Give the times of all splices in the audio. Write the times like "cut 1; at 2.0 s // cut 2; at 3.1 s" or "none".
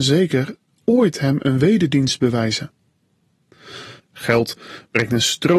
cut 1; at 4.0 s